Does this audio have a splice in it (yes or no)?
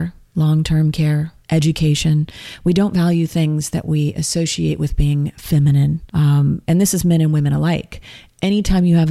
yes